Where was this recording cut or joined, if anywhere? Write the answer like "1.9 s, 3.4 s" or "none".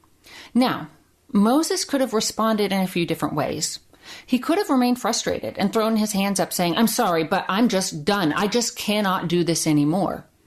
none